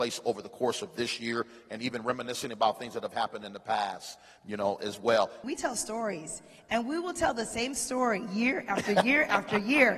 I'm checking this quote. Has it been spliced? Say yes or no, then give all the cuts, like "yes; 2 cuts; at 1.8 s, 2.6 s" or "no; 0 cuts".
yes; 1 cut; at 5.4 s